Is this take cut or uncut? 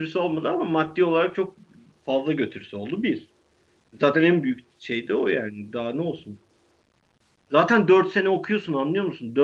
uncut